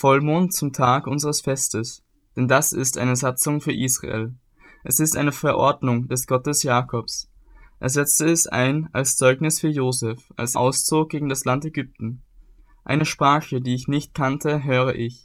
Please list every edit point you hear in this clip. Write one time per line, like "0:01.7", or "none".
0:10.5